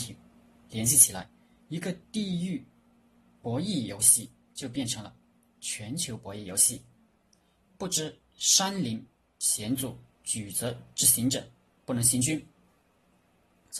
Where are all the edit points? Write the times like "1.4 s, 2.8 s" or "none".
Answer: none